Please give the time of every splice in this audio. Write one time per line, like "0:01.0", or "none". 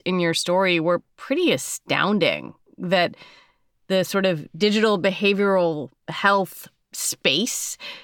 none

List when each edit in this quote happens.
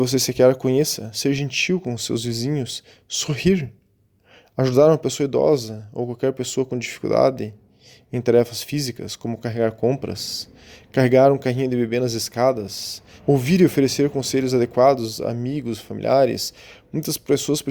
0:13.2

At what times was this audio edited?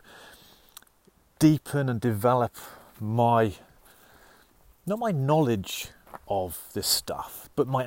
none

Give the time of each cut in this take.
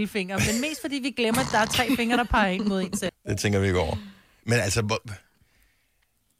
0:03.1
0:04.4

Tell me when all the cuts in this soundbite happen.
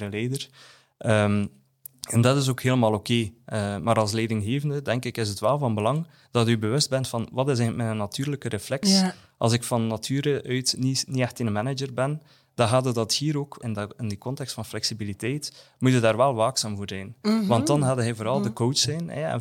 0:13.6

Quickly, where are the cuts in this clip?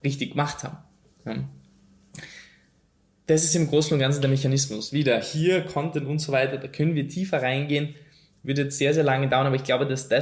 none

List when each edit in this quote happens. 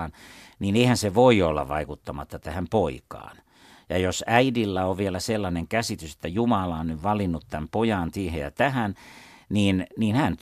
none

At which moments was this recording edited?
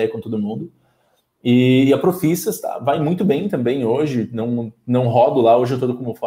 none

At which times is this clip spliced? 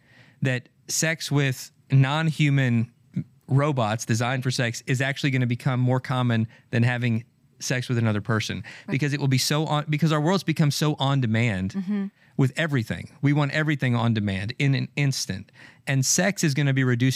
0:01.8

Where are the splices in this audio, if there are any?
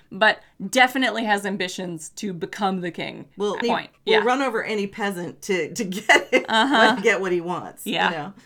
0:03.6
0:07.0

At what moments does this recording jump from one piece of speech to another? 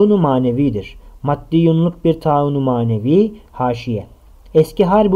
0:03.5

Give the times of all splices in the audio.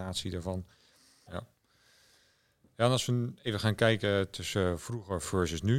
0:01.3

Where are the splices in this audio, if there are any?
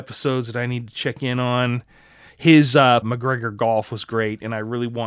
0:03.0

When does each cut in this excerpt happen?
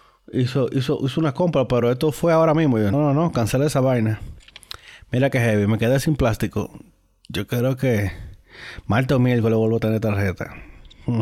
0:02.9

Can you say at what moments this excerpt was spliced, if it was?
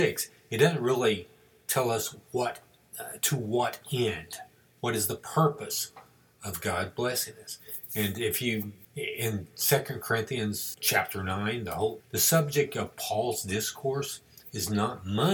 0:08.8
0:10.7
0:12.0

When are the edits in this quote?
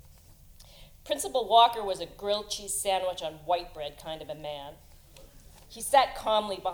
none

